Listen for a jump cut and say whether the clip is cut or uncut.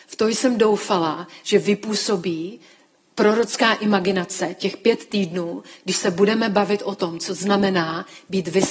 uncut